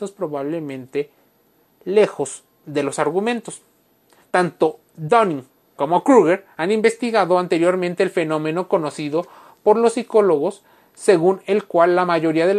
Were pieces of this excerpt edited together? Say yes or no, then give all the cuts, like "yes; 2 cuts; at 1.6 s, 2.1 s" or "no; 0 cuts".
yes; 1 cut; at 4.9 s